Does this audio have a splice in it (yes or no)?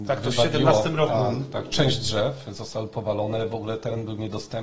no